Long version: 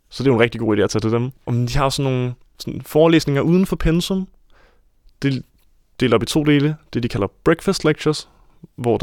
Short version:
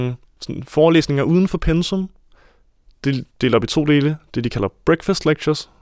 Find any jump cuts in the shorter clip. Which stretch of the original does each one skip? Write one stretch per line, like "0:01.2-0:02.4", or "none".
0:05.5-0:05.9